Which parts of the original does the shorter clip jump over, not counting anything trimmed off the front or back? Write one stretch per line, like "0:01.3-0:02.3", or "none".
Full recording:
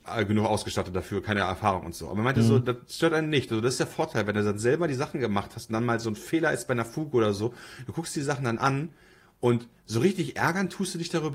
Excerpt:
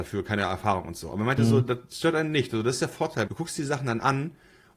0:04.3-0:07.9